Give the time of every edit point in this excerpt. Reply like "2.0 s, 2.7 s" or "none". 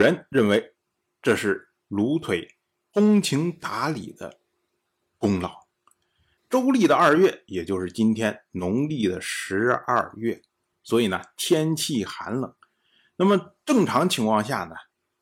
6.4 s